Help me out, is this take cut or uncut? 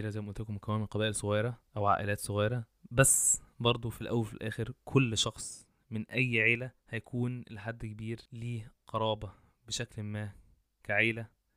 cut